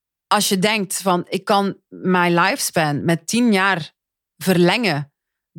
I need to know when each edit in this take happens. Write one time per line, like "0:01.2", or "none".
none